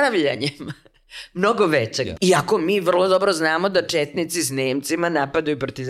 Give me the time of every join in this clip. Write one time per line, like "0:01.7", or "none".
0:02.2